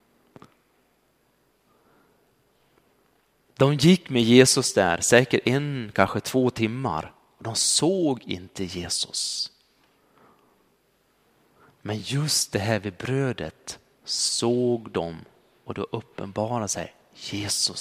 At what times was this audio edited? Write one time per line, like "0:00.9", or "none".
none